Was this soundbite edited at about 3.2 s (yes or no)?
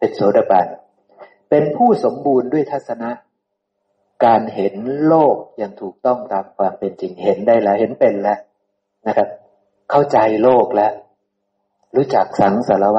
no